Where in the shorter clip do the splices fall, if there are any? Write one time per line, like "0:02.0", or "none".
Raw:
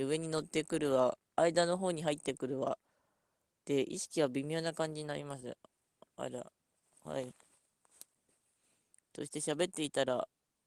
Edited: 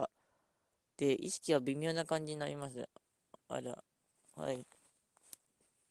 none